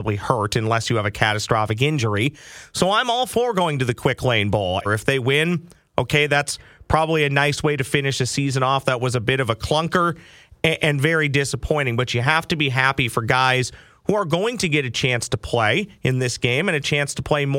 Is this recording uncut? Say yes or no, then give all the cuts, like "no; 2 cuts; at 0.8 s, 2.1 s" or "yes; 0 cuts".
no; 1 cut; at 4.9 s